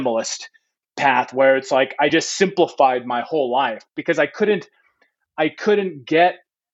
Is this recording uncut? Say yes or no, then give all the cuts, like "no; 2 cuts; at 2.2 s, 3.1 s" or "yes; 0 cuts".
yes; 0 cuts